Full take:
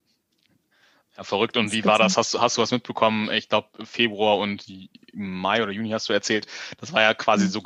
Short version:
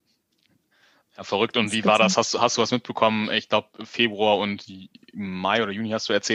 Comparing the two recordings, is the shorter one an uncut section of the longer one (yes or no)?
yes